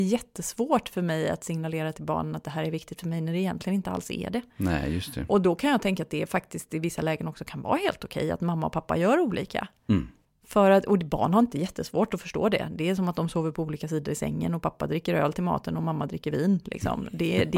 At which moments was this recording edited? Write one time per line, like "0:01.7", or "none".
0:10.3